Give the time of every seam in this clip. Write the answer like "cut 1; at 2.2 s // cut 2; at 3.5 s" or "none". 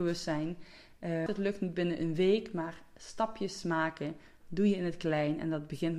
cut 1; at 1.3 s